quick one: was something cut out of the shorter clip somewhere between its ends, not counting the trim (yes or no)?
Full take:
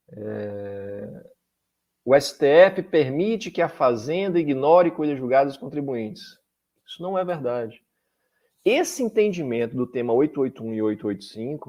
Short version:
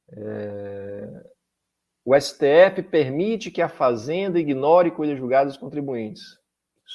no